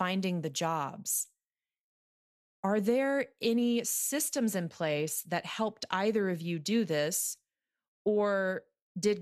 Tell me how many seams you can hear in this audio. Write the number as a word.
zero